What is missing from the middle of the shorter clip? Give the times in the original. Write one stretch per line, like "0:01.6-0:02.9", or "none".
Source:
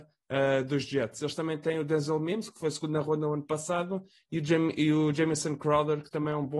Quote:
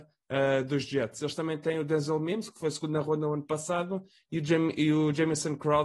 none

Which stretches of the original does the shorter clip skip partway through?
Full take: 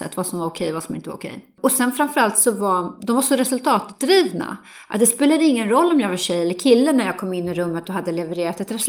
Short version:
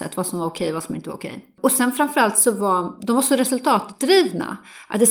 none

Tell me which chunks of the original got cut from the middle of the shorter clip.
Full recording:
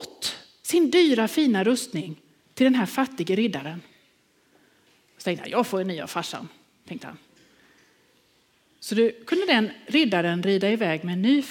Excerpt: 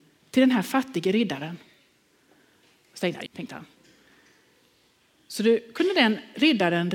0:05.5-0:06.8

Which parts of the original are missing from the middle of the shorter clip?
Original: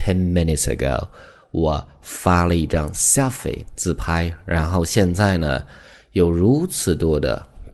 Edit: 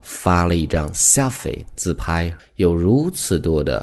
0:04.4-0:06.0

